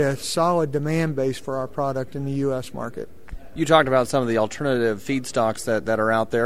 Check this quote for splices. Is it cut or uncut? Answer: uncut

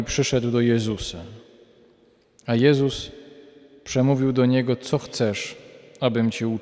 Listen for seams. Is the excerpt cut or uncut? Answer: uncut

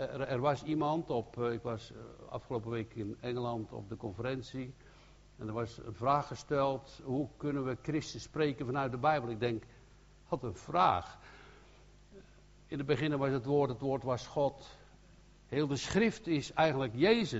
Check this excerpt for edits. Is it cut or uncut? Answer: cut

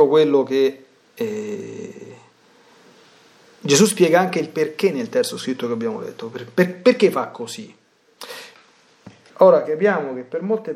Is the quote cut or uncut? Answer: cut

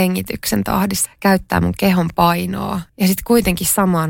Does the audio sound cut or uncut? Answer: cut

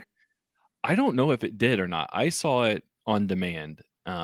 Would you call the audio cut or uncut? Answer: uncut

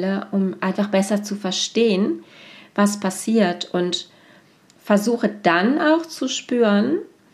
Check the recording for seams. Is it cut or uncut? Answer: uncut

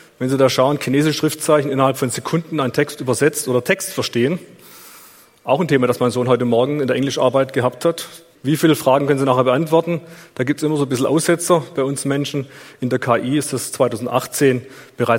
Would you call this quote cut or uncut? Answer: cut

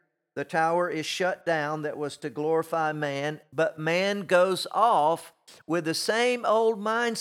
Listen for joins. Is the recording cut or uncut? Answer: uncut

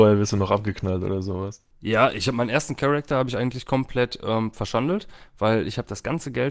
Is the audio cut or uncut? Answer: uncut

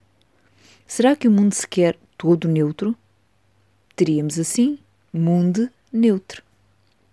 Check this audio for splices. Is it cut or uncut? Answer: uncut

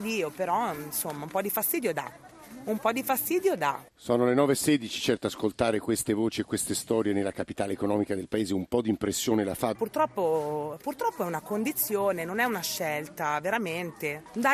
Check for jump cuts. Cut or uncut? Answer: cut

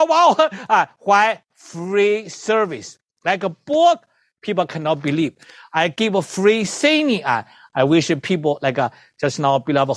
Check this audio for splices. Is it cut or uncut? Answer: uncut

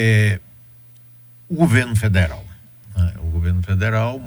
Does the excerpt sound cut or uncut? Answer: uncut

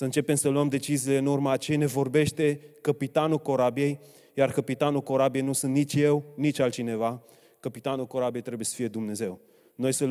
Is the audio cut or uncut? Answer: uncut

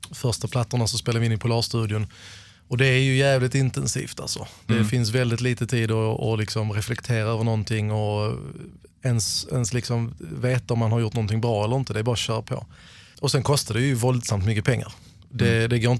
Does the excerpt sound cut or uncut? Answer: uncut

